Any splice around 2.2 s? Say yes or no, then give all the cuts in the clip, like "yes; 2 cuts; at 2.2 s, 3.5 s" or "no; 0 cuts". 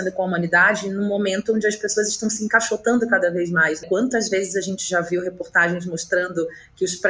no; 1 cut; at 3.8 s